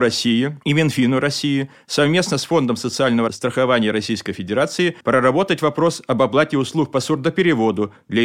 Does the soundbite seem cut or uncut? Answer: cut